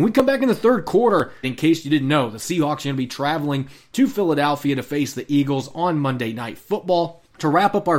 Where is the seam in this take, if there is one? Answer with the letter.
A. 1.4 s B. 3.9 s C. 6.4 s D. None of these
A